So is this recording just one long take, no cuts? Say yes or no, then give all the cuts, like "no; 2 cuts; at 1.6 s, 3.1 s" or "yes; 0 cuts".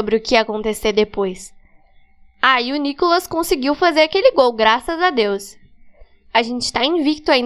yes; 0 cuts